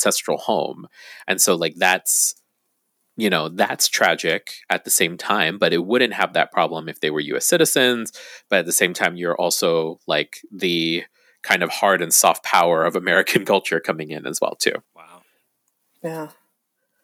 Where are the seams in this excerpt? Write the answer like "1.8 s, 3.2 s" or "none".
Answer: 14.8 s